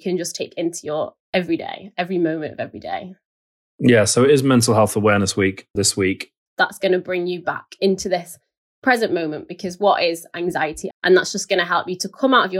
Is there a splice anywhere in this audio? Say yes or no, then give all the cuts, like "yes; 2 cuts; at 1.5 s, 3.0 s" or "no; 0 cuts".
yes; 2 cuts; at 6.5 s, 10.9 s